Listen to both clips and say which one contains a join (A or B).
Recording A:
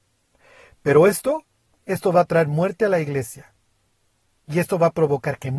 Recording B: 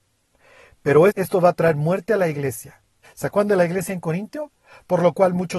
B